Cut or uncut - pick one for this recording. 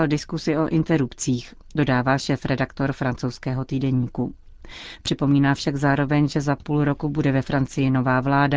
uncut